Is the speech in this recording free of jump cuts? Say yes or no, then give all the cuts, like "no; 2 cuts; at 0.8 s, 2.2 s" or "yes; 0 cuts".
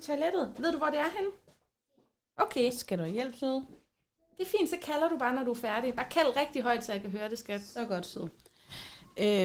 no; 1 cut; at 4.2 s